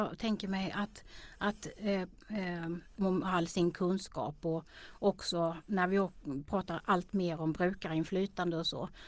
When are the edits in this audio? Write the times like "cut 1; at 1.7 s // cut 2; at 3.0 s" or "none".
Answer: cut 1; at 3.0 s